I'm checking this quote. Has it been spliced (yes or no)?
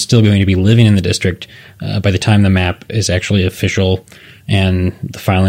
no